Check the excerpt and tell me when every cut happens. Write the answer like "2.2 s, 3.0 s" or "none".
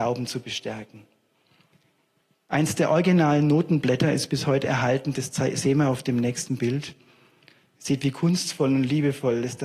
2.3 s